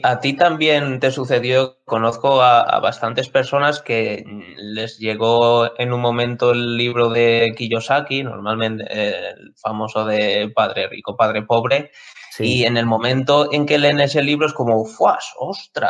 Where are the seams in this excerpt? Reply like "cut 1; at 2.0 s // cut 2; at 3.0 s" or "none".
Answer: none